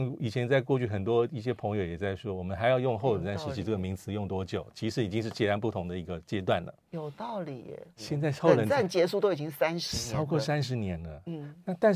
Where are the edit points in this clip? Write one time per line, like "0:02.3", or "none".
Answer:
0:08.0